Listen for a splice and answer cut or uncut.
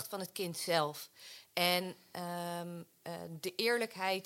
uncut